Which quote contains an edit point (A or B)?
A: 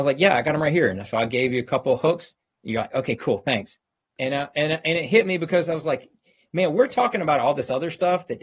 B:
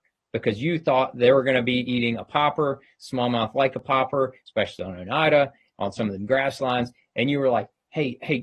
A